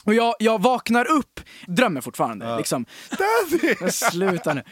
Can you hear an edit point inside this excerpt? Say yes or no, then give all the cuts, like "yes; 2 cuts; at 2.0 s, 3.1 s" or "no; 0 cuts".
yes; 2 cuts; at 1.7 s, 3.1 s